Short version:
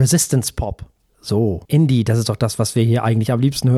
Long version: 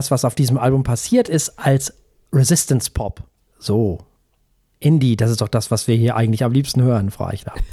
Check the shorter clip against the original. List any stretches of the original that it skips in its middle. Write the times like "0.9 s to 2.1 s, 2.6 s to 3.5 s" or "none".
4.0 s to 4.8 s